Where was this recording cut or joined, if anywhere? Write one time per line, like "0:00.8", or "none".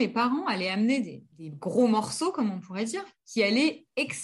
0:01.3